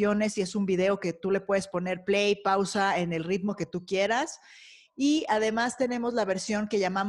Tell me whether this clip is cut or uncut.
uncut